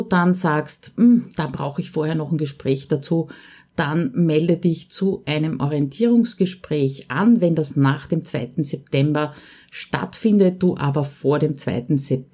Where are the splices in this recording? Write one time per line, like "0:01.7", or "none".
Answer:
none